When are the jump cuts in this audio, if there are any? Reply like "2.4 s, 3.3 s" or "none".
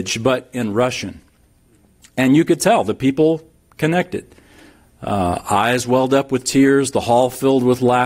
none